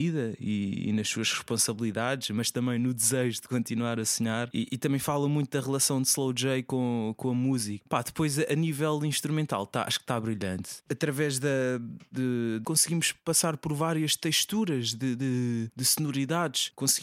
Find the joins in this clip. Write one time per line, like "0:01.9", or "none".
0:10.8
0:12.6